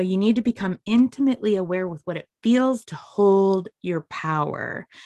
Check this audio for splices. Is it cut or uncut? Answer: cut